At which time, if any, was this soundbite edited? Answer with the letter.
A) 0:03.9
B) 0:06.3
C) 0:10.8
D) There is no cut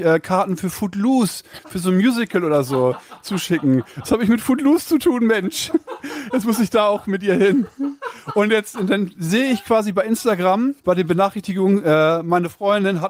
C